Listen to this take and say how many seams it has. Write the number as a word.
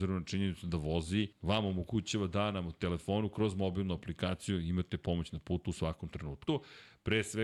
two